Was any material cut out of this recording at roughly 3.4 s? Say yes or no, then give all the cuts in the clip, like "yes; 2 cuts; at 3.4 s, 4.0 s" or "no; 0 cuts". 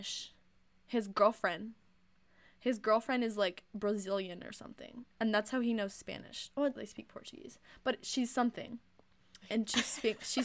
no; 3 cuts; at 5.1 s, 6.8 s, 9.4 s